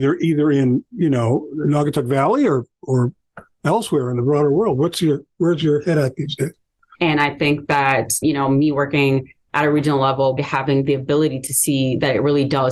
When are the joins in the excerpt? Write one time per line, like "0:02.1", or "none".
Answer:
0:06.9
0:08.2
0:10.4